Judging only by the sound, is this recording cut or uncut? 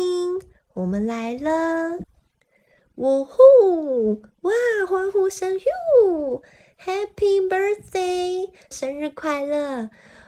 cut